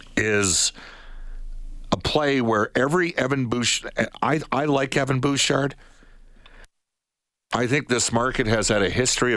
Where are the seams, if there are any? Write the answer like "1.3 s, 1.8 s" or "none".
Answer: none

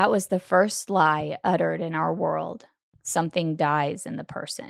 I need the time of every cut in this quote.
2.9 s

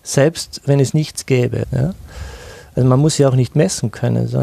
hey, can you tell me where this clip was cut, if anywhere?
1.6 s

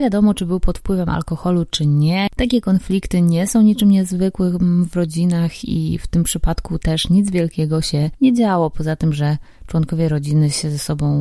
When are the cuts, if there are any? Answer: 2.3 s

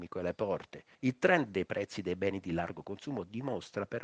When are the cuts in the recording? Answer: 0.9 s

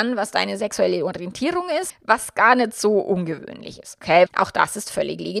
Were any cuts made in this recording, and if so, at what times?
1.9 s, 4.3 s

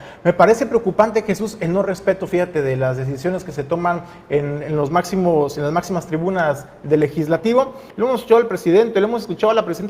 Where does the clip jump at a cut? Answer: 7.9 s

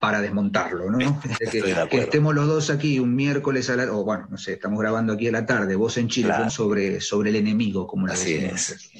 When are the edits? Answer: 1.4 s, 6.5 s

